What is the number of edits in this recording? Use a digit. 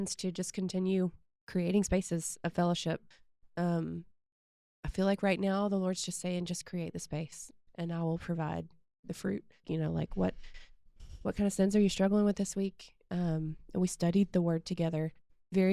1